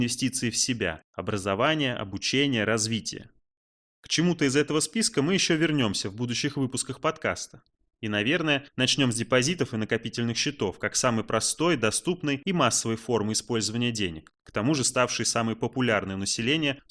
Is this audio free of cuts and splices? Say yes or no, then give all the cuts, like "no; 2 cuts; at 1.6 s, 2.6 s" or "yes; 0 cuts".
yes; 0 cuts